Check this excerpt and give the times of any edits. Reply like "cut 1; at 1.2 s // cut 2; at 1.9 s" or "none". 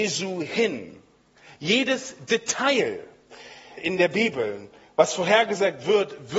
cut 1; at 3.8 s